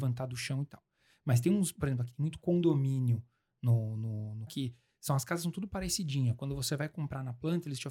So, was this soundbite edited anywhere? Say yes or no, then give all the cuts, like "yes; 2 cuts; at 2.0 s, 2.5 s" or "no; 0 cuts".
yes; 1 cut; at 4.5 s